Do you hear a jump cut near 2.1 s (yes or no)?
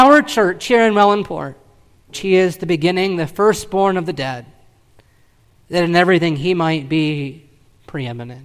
yes